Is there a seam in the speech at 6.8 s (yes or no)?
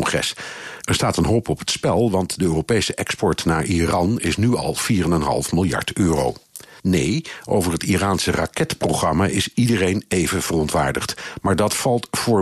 yes